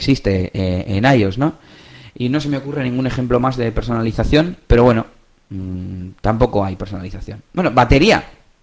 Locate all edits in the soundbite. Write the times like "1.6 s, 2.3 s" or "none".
none